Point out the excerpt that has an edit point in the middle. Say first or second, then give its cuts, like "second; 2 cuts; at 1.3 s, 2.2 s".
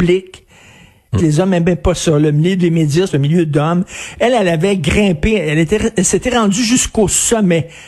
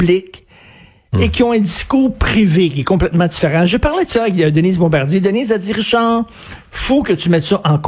first; 2 cuts; at 1.2 s, 3.1 s